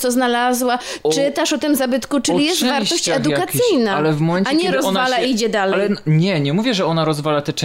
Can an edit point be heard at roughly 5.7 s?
no; 0 cuts

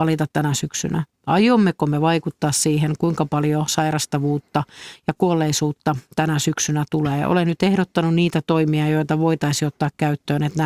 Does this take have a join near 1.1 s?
no; 0 cuts

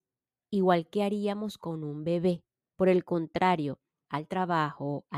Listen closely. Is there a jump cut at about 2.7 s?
yes; 2 cuts; at 2.7 s, 4.1 s

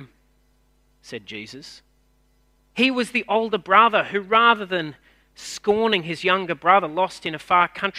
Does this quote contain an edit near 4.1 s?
no; 1 cut; at 2.6 s

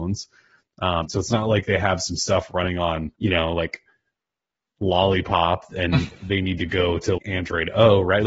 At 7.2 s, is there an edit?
yes; 3 cuts; at 1.1 s, 3.2 s, 7.2 s

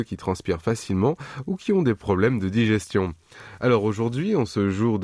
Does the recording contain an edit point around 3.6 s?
no; 0 cuts

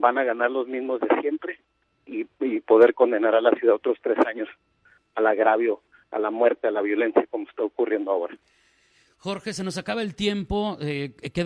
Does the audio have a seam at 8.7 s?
no; 0 cuts

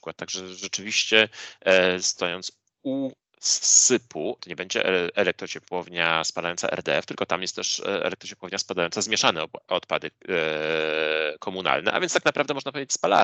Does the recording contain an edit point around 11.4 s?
no; 1 cut; at 4.4 s

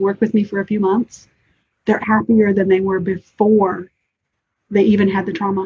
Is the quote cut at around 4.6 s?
no; 1 cut; at 2.0 s

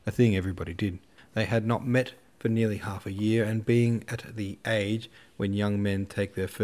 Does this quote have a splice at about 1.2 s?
yes; 1 cut; at 1.2 s

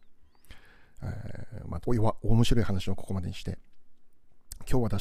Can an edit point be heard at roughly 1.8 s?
yes; 1 cut; at 1.8 s

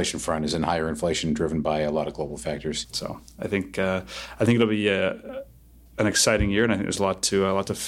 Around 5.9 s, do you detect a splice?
no; 1 cut; at 2.8 s

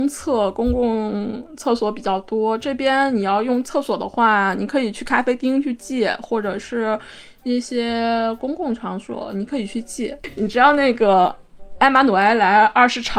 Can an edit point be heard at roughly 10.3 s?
no; 0 cuts

